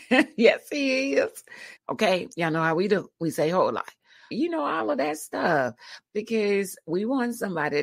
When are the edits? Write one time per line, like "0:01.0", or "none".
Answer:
0:01.8
0:04.3